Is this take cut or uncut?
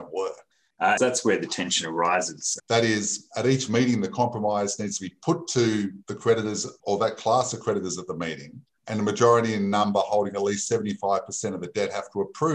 cut